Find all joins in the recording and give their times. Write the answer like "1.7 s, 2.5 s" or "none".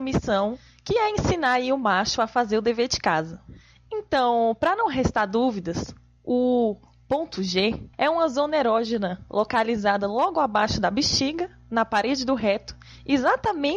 7.9 s